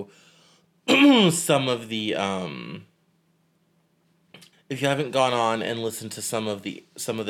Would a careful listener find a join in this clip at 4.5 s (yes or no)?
yes